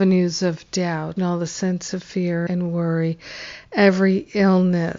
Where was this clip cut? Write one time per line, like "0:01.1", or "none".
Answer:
0:01.2
0:02.5